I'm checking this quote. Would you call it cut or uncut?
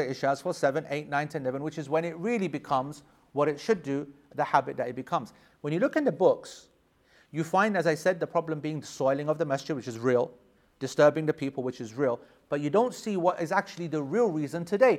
cut